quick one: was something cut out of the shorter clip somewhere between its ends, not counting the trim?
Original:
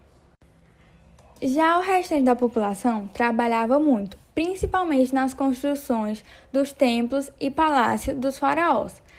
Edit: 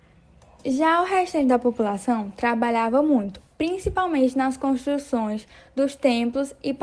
no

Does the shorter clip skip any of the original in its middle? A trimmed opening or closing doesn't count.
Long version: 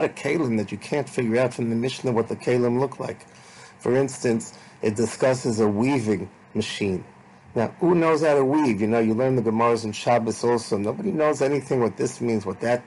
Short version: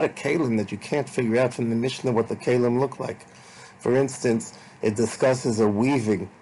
no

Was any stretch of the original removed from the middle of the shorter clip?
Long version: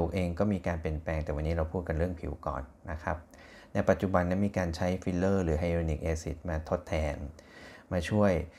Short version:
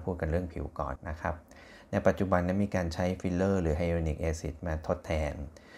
yes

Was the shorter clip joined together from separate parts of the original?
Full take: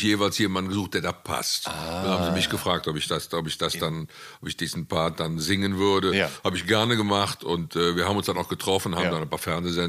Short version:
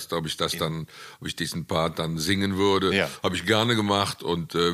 no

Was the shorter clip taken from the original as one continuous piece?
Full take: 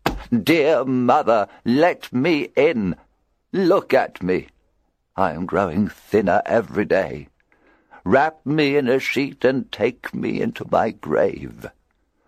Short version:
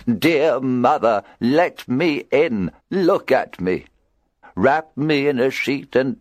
no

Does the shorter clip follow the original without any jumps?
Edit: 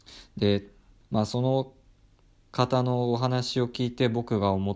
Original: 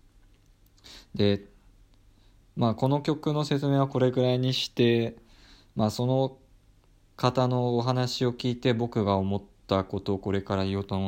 no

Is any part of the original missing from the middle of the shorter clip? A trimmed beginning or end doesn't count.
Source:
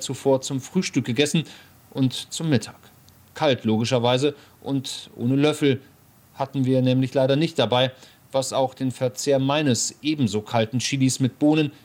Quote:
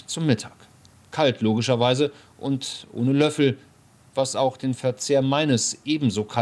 yes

